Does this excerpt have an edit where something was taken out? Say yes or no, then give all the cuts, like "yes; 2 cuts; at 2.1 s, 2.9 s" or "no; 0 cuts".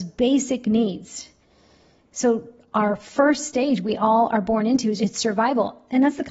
yes; 1 cut; at 5.0 s